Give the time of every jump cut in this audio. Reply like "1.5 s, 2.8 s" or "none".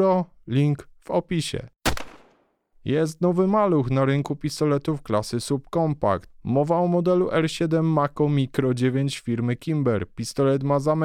none